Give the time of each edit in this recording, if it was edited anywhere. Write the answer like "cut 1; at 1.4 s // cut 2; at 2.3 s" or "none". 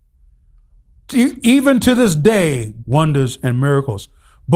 cut 1; at 2.8 s